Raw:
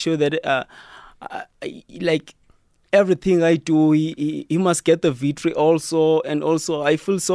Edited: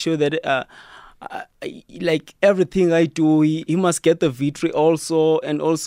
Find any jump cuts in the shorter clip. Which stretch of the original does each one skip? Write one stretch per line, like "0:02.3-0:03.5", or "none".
0:02.4-0:02.9
0:04.2-0:04.5